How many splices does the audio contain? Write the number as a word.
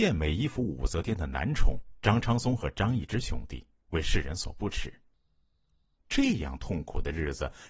one